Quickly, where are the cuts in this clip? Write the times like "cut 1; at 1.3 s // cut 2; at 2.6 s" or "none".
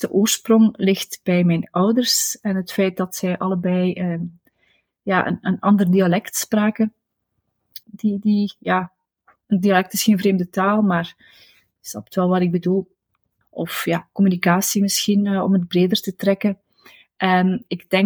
cut 1; at 7.8 s // cut 2; at 13.4 s